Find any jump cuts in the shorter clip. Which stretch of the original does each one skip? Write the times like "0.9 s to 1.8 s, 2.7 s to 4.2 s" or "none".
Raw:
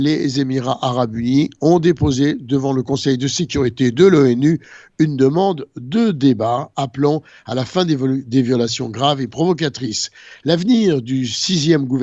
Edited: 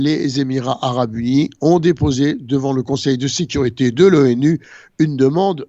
none